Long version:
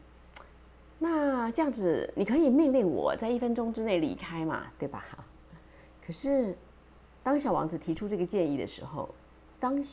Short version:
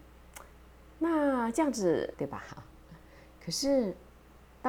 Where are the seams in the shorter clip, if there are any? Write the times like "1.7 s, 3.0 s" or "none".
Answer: 2.1 s

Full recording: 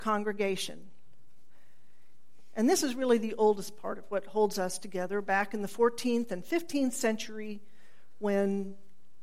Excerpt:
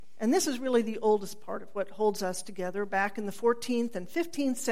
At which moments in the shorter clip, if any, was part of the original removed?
none

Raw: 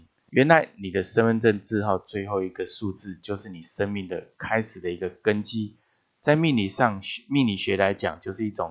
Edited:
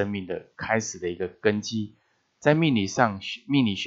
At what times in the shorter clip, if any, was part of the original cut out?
none

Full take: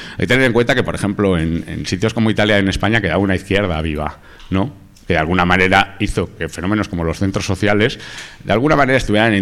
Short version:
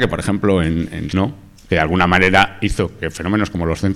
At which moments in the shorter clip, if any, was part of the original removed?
1.1 s

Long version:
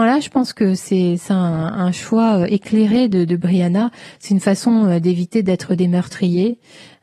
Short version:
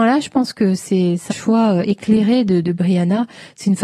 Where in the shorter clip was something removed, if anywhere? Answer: 1.3 s

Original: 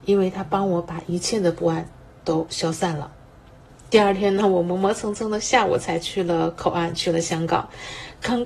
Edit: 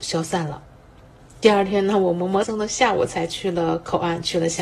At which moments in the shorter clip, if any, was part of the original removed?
2.4 s

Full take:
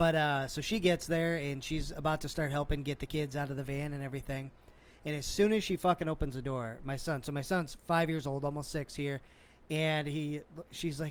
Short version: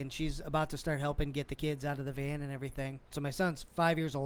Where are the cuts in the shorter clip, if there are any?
3.1 s

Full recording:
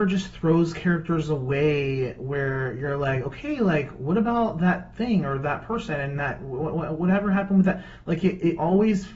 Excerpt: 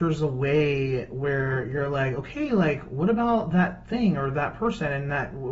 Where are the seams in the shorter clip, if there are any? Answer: none

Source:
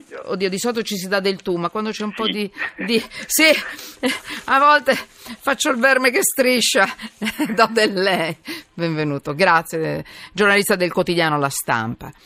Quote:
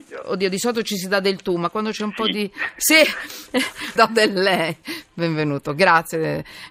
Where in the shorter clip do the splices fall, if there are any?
2.8 s, 4.0 s

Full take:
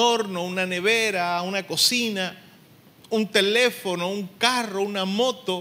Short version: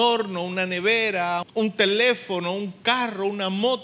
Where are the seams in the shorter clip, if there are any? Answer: 1.4 s

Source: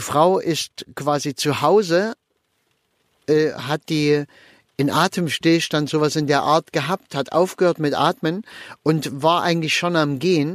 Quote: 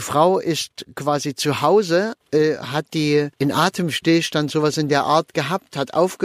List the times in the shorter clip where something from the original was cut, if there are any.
2.2 s, 3.3 s

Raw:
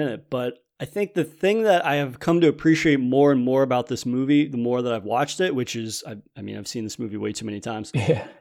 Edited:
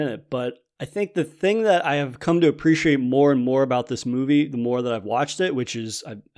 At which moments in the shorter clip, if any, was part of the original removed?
none

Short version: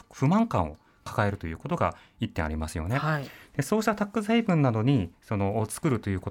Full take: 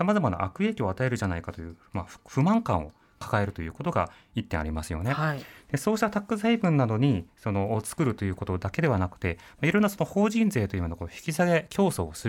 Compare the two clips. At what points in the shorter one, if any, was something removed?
none

